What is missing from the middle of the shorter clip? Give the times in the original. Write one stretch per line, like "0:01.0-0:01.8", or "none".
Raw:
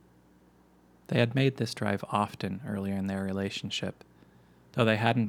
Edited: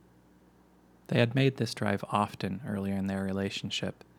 none